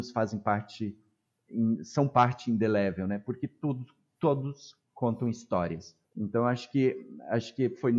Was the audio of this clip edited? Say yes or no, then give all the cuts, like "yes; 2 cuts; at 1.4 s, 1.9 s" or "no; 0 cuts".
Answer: yes; 1 cut; at 6.1 s